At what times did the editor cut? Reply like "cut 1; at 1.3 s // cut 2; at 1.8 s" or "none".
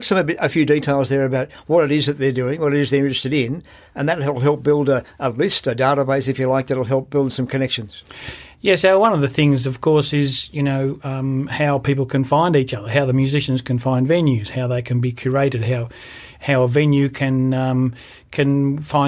none